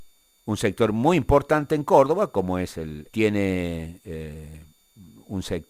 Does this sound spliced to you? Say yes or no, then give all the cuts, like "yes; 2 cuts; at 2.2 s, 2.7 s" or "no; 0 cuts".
yes; 1 cut; at 3.1 s